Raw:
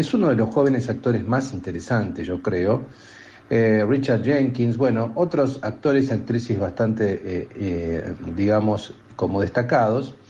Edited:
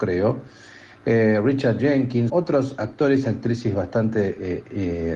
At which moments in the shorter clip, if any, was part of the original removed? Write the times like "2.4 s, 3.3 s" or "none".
2.3 s